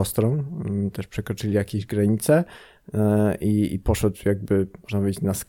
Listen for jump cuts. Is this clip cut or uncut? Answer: uncut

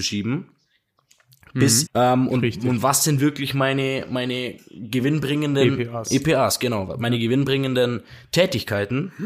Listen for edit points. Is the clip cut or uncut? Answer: cut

